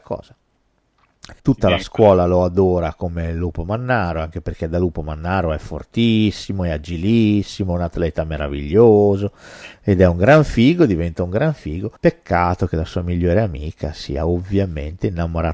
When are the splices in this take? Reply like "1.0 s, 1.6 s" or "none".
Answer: 1.4 s, 12.0 s